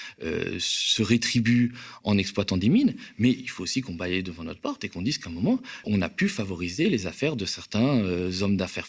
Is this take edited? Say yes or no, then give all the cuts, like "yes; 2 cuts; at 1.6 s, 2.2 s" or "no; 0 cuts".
yes; 1 cut; at 5.8 s